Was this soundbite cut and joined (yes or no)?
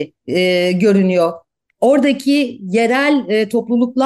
no